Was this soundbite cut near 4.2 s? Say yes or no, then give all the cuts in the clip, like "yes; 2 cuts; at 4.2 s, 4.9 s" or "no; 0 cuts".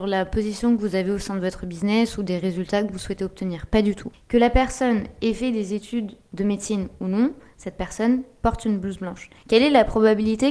yes; 2 cuts; at 4.2 s, 9.4 s